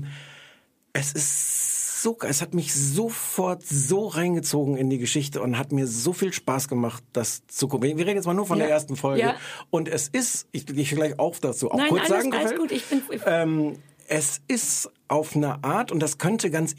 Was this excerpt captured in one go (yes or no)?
no